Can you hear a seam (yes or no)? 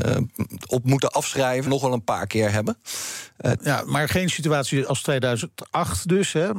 yes